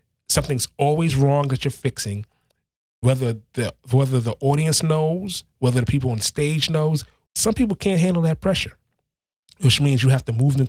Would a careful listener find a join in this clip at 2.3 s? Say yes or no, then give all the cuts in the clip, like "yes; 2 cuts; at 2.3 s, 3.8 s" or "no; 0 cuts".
no; 1 cut; at 7.3 s